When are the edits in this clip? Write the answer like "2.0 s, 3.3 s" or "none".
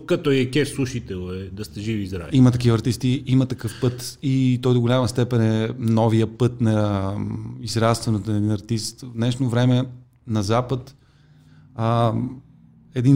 none